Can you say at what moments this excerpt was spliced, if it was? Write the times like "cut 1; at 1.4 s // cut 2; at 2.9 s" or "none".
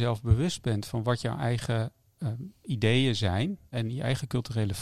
cut 1; at 2.2 s // cut 2; at 3.7 s